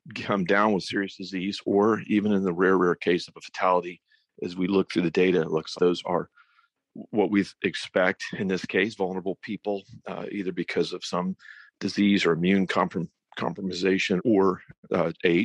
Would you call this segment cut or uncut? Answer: cut